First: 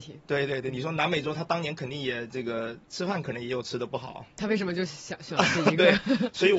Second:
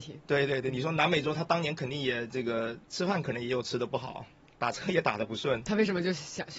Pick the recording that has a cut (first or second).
first